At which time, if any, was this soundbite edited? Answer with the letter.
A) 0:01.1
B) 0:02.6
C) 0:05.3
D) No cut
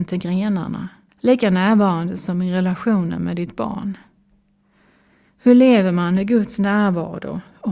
A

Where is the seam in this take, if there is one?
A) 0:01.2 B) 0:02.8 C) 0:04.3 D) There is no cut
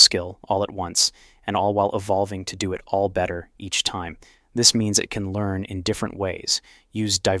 C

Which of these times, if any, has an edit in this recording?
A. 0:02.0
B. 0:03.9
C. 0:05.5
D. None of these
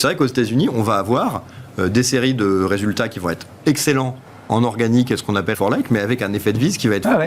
C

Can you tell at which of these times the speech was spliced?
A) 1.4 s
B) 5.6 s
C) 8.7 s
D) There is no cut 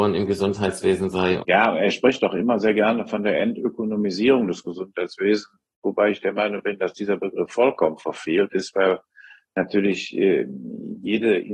A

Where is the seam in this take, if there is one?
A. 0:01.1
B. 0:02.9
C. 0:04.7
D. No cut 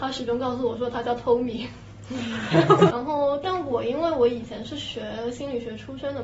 B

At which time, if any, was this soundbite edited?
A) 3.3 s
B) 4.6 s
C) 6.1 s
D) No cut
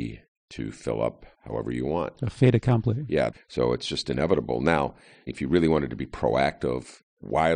A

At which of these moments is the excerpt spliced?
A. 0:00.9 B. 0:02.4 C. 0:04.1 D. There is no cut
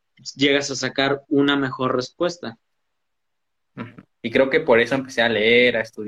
C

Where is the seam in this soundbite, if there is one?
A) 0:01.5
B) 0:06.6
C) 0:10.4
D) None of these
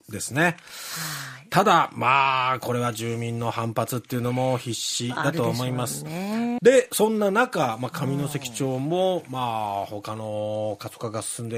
B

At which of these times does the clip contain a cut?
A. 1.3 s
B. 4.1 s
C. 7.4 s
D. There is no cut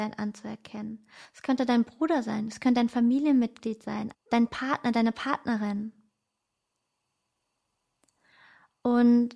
B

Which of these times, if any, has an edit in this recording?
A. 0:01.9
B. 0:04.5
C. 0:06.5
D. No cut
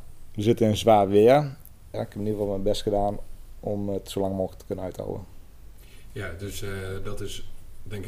A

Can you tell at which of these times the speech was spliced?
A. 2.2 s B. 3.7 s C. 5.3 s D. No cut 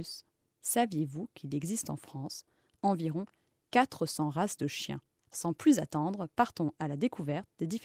C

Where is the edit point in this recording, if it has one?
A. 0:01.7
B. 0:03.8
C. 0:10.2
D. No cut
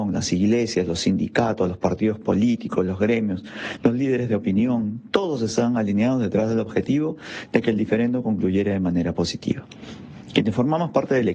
D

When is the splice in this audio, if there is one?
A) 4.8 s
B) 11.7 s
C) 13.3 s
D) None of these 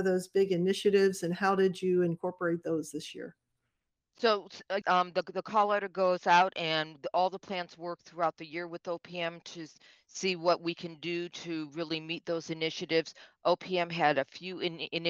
A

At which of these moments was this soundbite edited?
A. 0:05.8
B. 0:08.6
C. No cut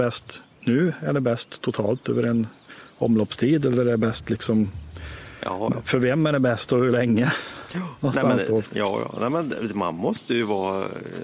B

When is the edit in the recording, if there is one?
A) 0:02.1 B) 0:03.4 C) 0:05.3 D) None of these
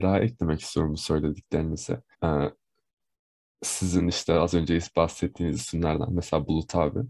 A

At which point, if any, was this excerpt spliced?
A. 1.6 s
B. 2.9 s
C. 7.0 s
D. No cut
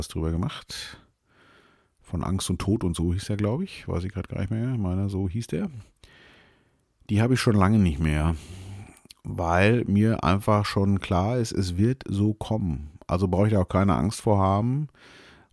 D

